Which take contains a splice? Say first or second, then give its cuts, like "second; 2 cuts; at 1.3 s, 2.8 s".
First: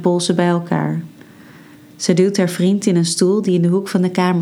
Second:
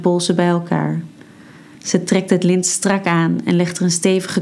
first; 1 cut; at 1.7 s